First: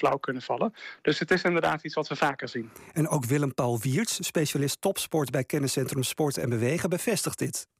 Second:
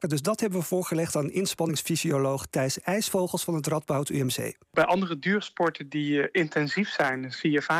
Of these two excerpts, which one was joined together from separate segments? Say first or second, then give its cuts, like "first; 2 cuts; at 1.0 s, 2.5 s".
second; 1 cut; at 4.6 s